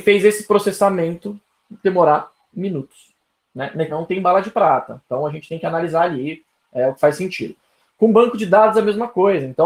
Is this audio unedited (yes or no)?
no